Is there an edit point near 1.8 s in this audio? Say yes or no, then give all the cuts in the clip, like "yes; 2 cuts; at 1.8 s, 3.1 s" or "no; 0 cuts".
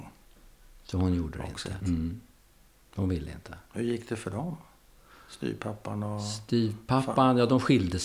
yes; 1 cut; at 1.8 s